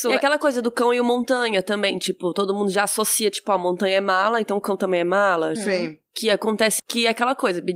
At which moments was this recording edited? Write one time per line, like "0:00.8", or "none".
0:05.6
0:06.8